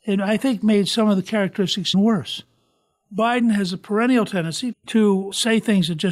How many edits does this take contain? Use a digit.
2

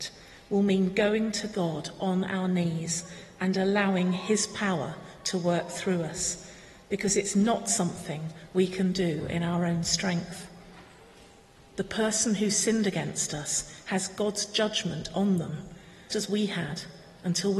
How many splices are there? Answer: 1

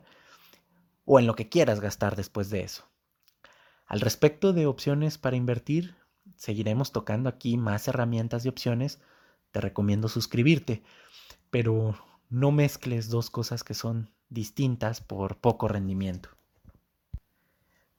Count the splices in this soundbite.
0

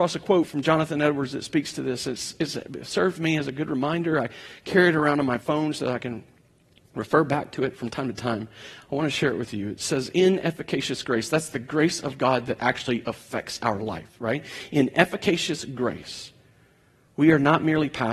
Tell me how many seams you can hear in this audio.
0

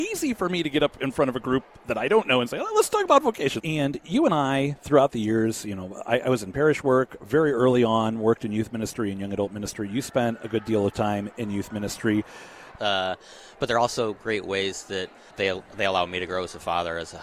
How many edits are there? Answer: 3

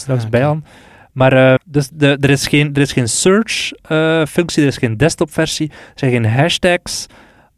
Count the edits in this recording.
1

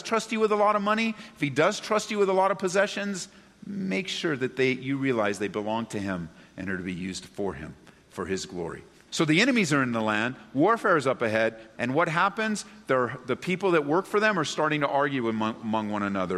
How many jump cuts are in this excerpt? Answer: 2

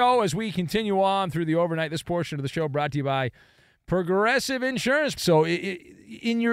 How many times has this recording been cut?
1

